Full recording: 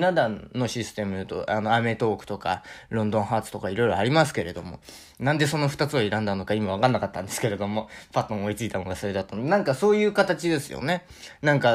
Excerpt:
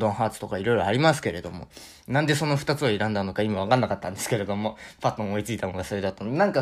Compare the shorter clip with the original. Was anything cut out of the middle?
no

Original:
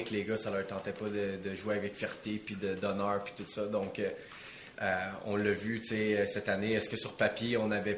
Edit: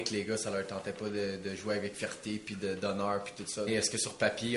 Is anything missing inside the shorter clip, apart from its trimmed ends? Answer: yes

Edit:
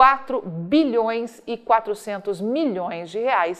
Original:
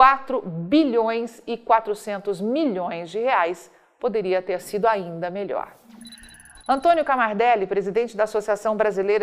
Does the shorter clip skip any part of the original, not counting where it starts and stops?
no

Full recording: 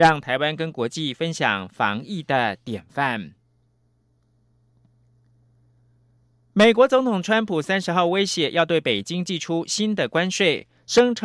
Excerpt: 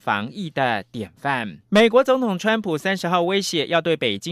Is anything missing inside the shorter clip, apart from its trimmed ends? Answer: yes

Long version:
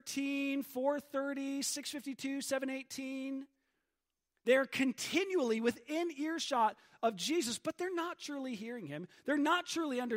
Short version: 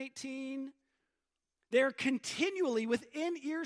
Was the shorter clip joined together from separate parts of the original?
no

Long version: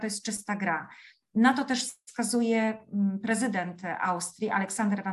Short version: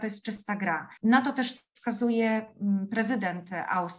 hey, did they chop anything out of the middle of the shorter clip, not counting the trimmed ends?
yes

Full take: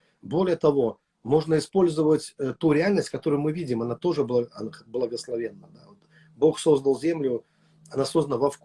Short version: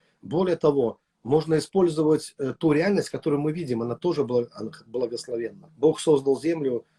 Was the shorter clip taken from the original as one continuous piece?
no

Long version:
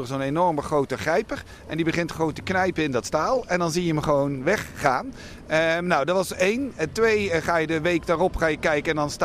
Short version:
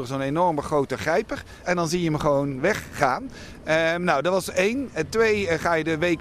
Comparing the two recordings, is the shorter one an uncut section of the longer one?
no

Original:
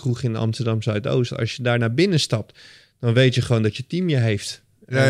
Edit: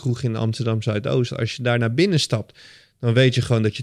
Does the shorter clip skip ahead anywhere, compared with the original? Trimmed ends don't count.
no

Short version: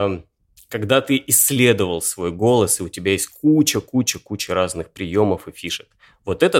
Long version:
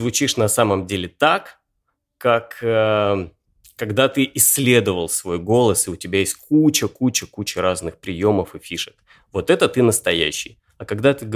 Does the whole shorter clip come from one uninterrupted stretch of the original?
yes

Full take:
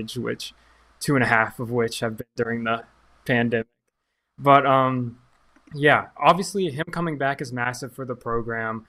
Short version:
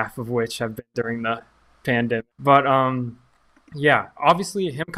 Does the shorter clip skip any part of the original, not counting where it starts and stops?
yes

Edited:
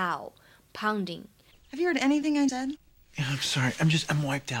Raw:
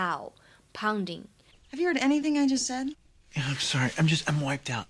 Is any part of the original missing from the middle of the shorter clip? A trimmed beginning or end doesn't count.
yes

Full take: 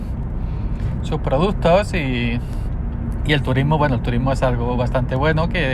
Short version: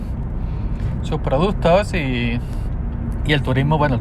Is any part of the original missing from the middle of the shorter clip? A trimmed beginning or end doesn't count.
no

